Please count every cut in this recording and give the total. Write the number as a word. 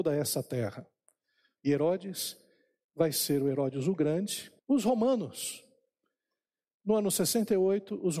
two